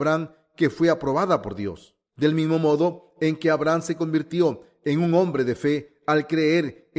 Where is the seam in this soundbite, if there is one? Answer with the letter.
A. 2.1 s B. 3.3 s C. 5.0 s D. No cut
A